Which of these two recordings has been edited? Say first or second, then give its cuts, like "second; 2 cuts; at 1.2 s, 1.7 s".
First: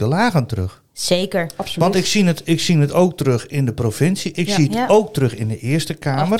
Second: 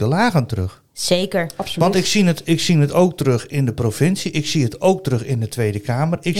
first; 1 cut; at 4.3 s